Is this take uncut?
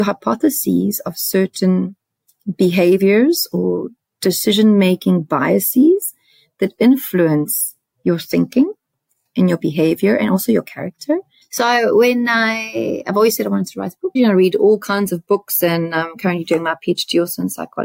no; 2 cuts; at 11.4 s, 14.2 s

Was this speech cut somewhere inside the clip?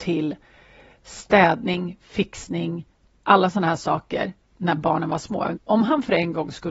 yes; 2 cuts; at 3.2 s, 5.6 s

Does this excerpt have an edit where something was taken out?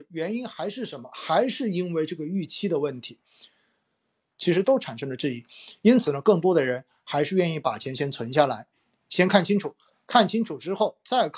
yes; 1 cut; at 4.3 s

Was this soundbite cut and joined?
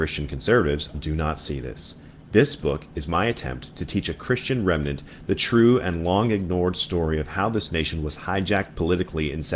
yes; 1 cut; at 0.9 s

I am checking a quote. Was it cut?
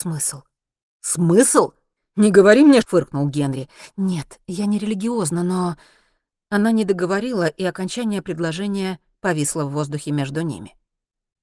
yes; 1 cut; at 2.8 s

